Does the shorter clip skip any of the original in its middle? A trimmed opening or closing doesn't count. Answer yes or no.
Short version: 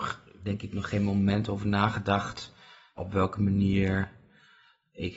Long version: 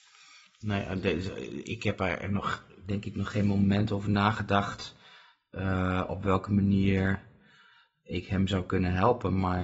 yes